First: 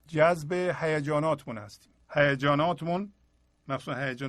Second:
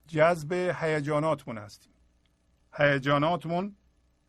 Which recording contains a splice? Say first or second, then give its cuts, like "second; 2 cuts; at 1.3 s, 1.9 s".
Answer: first; 1 cut; at 2.0 s